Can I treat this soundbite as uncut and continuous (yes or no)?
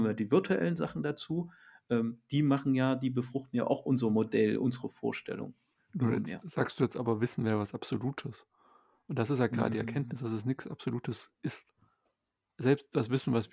yes